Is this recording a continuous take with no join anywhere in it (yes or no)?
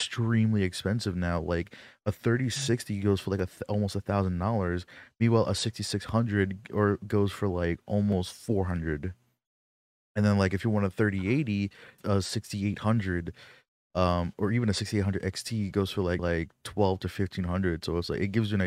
no